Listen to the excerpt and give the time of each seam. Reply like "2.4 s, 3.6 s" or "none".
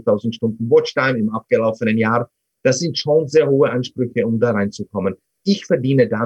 none